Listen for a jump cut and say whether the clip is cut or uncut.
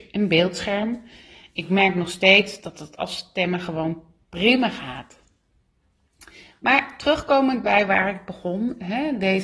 uncut